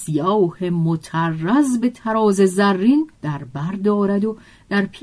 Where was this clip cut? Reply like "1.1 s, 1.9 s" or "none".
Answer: 3.2 s